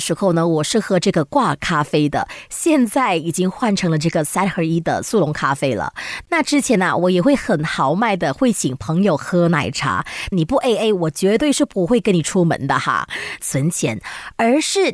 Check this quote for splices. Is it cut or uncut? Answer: cut